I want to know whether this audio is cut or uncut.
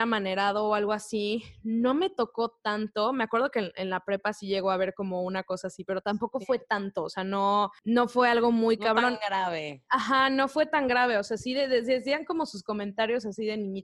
uncut